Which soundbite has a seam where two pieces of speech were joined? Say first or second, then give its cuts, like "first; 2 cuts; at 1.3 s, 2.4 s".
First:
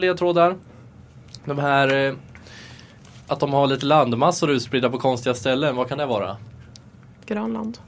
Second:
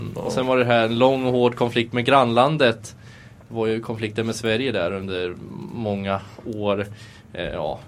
first; 1 cut; at 3.2 s